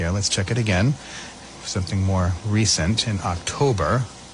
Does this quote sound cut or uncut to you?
uncut